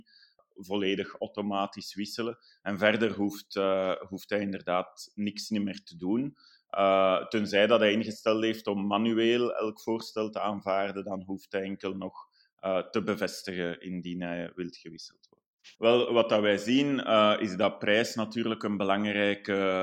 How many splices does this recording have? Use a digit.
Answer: 1